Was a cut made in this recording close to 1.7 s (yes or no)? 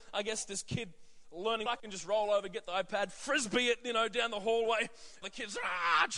yes